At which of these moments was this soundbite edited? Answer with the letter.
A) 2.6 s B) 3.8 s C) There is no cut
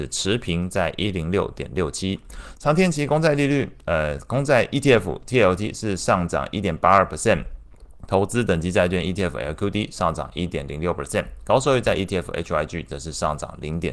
A